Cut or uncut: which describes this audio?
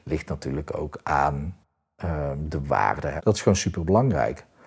cut